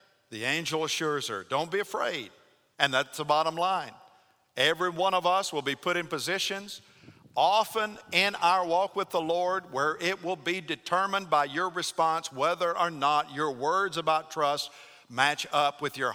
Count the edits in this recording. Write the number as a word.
one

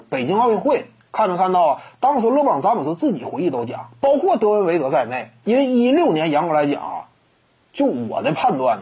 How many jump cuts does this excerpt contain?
one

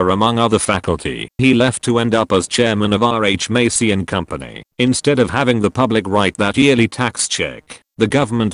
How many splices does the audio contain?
two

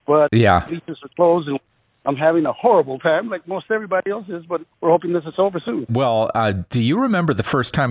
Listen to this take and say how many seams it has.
one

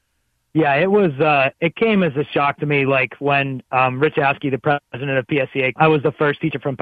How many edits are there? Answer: one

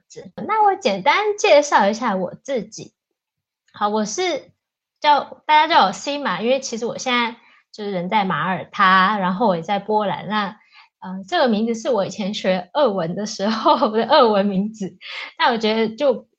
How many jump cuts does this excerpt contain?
zero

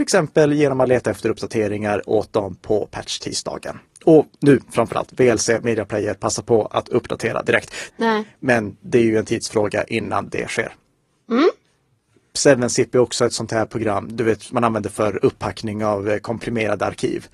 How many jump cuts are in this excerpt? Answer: two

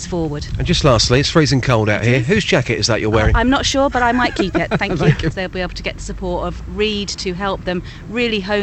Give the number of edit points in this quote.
one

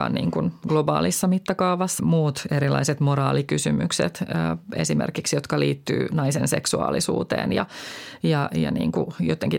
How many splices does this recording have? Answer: one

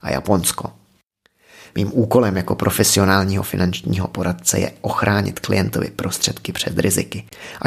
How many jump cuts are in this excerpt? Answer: one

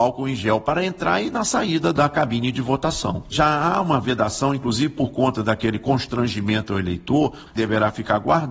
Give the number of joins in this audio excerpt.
two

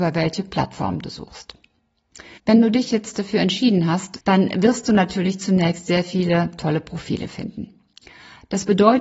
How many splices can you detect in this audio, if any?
two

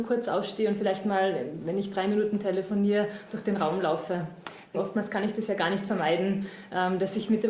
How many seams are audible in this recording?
one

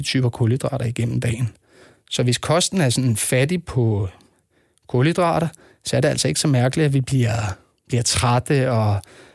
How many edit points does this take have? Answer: zero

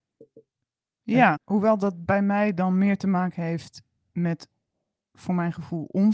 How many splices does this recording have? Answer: one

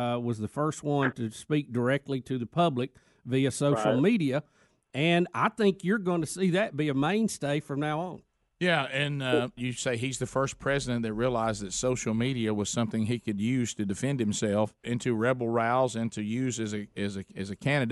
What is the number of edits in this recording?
two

